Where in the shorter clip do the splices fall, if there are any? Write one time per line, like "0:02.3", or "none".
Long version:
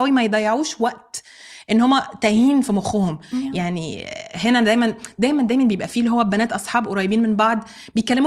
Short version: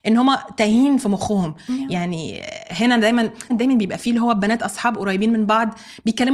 0:03.5